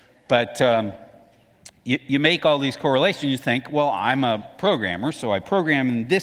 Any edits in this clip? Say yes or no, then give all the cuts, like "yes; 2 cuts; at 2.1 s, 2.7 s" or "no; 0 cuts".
no; 0 cuts